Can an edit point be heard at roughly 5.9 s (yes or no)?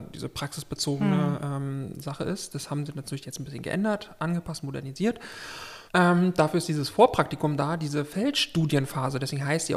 yes